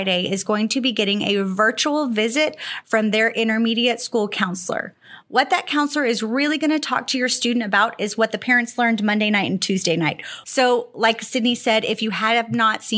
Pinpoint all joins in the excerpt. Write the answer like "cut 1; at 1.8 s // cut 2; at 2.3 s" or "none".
cut 1; at 10.4 s